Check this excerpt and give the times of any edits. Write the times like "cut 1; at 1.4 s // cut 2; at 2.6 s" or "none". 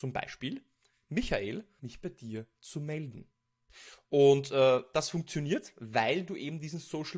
cut 1; at 1.8 s